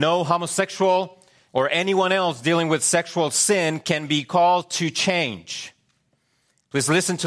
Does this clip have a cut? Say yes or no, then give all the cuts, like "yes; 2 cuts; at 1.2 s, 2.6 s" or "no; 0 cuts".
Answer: yes; 1 cut; at 1.5 s